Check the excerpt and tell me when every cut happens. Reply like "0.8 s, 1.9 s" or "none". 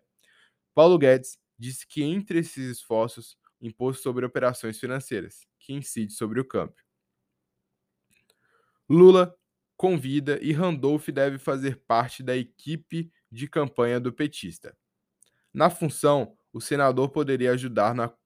3.5 s